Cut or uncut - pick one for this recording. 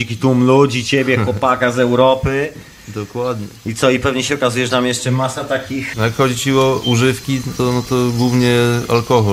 cut